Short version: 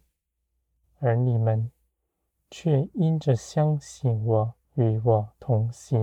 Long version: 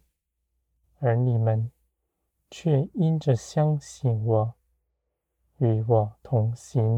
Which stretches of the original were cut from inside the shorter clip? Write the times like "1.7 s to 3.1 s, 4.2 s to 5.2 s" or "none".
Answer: 4.7 s to 5.5 s